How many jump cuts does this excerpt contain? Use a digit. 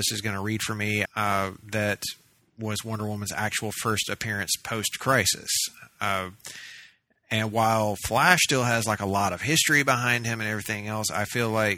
1